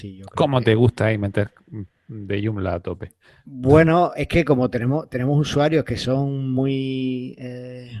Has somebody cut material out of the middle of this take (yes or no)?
no